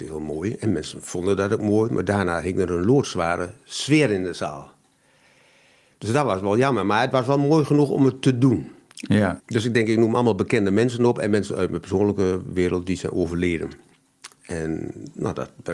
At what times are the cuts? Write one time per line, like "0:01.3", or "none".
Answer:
0:09.4